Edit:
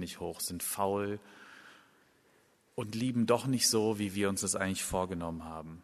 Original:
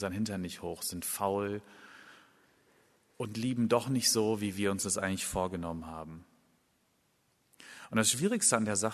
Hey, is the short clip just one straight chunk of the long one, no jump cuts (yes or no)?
yes